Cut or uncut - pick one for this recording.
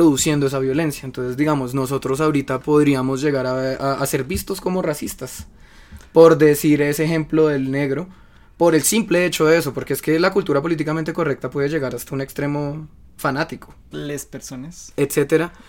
cut